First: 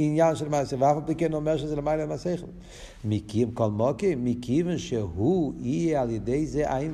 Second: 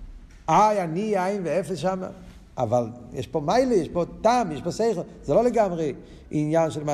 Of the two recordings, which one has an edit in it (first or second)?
second